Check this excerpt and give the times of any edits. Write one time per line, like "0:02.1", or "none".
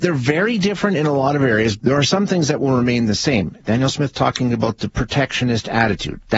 0:01.8